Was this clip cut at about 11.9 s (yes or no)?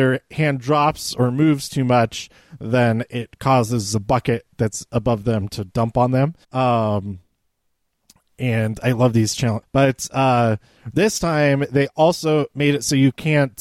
no